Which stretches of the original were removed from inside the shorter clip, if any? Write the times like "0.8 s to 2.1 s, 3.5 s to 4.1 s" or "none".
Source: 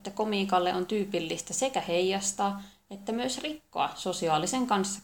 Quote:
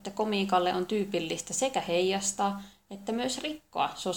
none